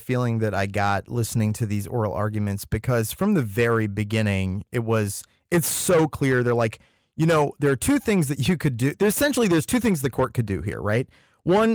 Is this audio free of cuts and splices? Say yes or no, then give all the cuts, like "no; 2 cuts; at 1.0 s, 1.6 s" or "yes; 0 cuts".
yes; 0 cuts